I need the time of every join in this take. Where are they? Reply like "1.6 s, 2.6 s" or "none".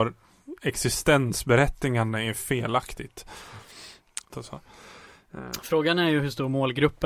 4.3 s